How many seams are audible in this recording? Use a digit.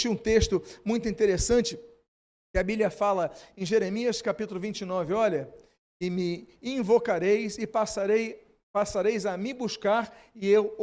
0